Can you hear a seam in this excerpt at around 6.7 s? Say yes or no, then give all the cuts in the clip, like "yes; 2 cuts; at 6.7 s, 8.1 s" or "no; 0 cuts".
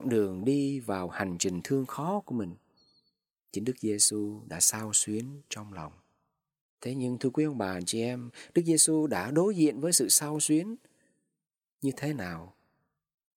yes; 1 cut; at 6.7 s